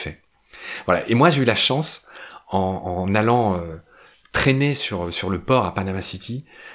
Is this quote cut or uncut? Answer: uncut